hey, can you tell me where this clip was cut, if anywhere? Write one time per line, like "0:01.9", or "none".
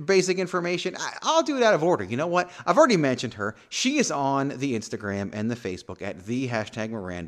none

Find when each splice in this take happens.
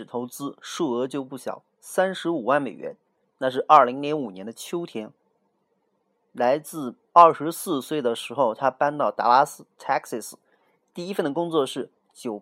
0:07.0

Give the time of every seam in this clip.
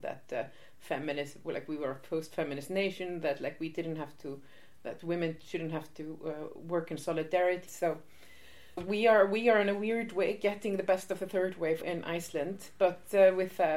0:07.7
0:08.8
0:11.8

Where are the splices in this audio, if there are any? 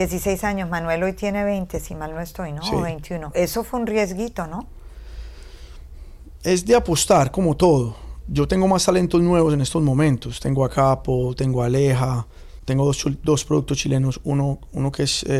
0:03.3

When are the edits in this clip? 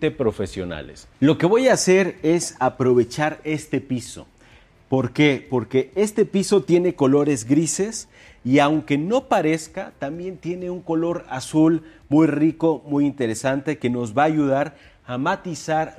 0:01.1

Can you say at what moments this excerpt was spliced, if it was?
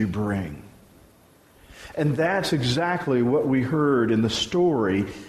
none

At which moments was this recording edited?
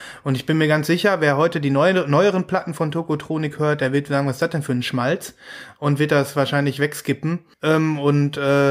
0:07.5

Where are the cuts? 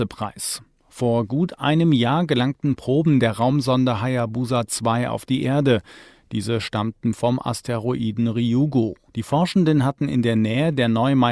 0:09.1

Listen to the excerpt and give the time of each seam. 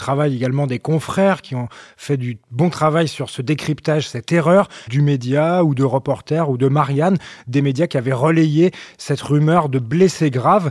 0:04.9

